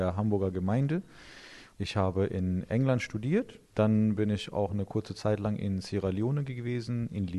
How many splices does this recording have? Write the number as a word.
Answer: two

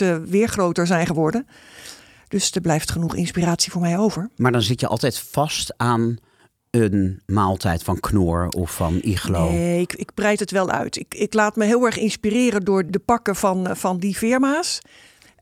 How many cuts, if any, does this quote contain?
zero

